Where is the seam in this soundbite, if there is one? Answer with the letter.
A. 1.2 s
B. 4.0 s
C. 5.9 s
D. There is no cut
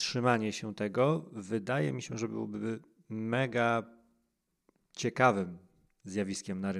D